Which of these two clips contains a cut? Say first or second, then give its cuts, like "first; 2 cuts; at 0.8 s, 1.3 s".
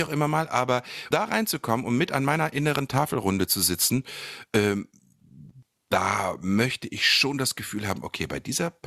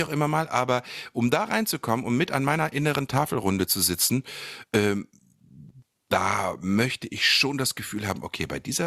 first; 1 cut; at 1.1 s